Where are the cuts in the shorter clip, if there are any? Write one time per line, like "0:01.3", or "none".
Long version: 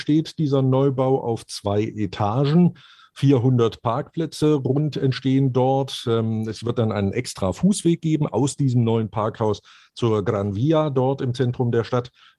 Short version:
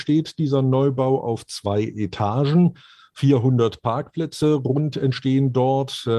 none